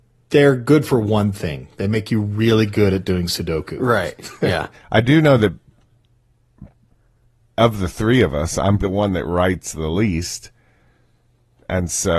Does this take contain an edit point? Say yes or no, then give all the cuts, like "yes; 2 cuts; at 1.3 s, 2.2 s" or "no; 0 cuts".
yes; 2 cuts; at 4.7 s, 8.8 s